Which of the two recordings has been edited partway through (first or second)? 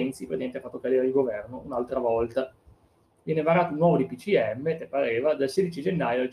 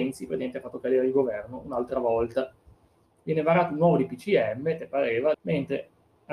second